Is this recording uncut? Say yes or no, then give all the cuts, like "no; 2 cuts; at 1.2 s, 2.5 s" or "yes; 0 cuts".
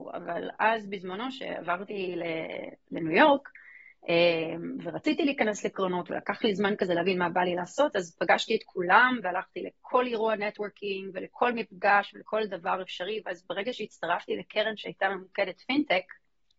yes; 0 cuts